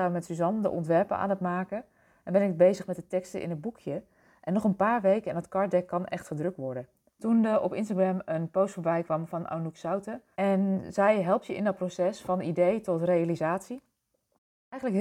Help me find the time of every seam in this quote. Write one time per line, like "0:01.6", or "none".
0:07.1
0:10.3